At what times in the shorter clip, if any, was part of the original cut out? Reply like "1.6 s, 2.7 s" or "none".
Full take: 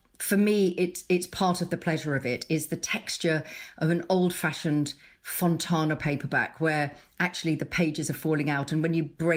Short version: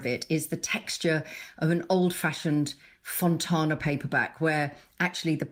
none

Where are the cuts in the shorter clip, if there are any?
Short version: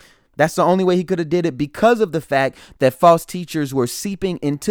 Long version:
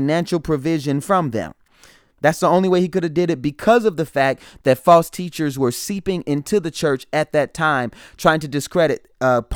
none

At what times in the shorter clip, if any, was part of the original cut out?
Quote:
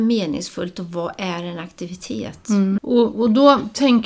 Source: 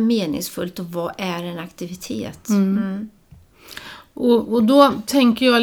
2.8 s

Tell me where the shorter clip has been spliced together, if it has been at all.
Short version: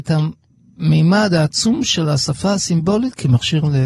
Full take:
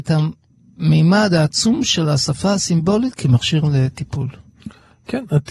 none

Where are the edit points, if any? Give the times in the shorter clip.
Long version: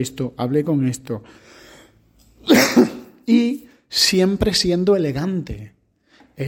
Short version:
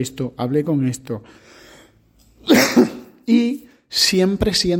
none

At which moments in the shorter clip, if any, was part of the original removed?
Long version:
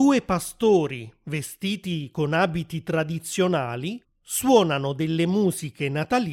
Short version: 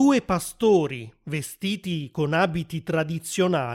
none

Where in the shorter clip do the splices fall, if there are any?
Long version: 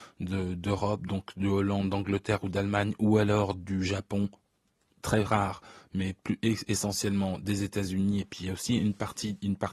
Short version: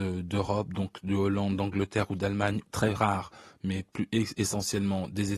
2.6 s

